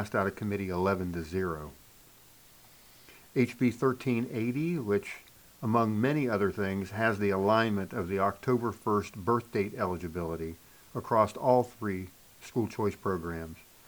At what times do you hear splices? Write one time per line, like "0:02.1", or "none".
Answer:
none